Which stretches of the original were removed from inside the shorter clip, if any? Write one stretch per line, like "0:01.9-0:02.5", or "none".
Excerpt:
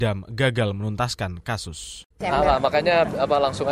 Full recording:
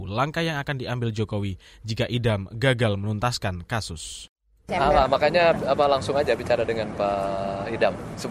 0:04.3-0:04.6